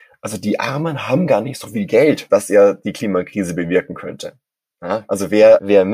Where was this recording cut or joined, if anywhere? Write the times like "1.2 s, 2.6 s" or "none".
2.3 s